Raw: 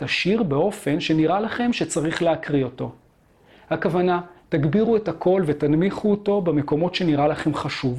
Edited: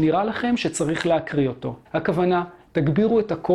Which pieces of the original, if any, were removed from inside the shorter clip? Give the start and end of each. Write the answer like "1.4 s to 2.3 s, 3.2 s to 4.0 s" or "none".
3.0 s to 3.6 s